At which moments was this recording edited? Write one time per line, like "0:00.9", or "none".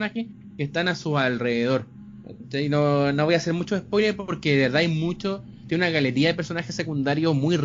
none